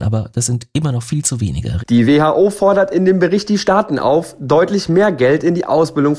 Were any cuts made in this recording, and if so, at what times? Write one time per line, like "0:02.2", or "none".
0:01.8